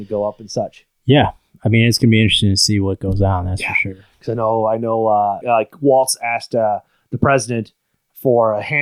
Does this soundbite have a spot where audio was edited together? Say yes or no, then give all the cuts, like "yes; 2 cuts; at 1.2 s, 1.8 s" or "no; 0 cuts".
yes; 1 cut; at 5.4 s